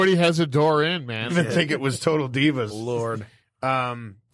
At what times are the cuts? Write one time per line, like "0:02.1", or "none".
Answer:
0:01.3
0:02.7